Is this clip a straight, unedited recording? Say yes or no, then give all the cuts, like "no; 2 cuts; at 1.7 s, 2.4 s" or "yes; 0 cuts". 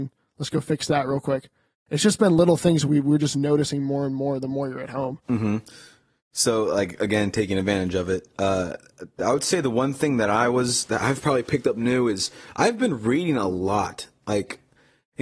yes; 0 cuts